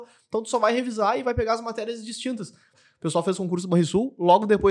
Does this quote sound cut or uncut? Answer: cut